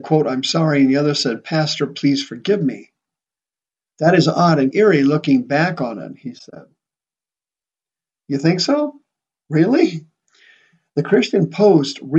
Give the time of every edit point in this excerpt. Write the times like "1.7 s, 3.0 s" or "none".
4.7 s